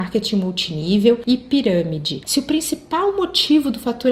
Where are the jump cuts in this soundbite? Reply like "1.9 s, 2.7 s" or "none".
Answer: 2.2 s